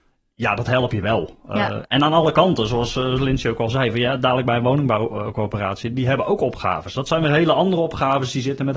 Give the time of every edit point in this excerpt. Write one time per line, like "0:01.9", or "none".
none